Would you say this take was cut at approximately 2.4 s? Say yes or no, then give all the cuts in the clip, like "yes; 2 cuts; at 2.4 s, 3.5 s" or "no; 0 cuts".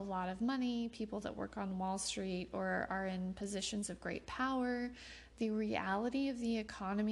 no; 1 cut; at 5.3 s